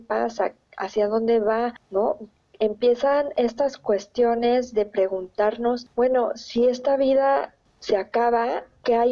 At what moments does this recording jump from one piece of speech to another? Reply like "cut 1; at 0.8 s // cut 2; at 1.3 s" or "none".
none